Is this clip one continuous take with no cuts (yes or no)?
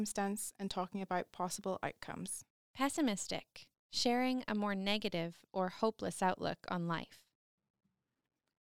yes